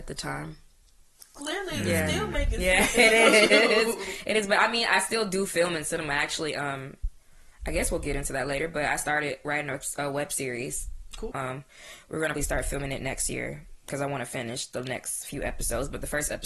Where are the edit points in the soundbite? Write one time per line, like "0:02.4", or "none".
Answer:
0:11.3
0:12.4